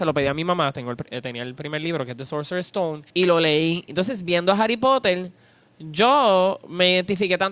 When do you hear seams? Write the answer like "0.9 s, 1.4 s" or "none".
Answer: 3.1 s